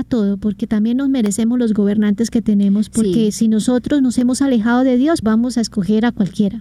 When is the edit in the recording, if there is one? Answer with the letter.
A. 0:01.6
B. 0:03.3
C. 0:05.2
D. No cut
C